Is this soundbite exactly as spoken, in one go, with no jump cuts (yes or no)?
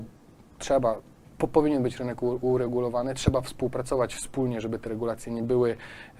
no